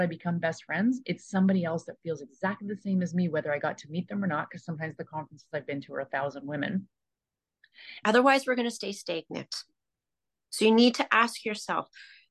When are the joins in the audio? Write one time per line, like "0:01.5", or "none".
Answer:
0:08.0